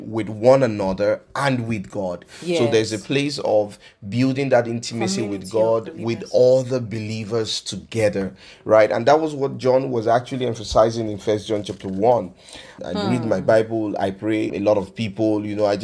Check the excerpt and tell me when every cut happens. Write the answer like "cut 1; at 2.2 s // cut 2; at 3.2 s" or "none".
cut 1; at 12.8 s // cut 2; at 14.5 s